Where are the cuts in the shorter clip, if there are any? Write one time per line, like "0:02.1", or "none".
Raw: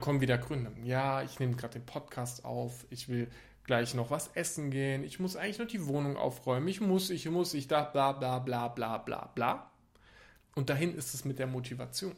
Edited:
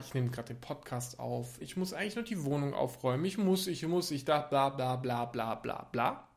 0:01.6